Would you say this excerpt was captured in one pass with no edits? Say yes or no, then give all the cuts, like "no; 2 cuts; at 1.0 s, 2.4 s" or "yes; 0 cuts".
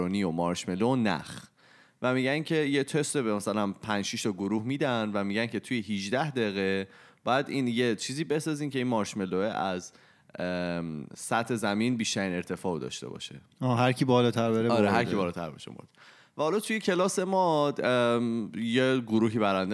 yes; 0 cuts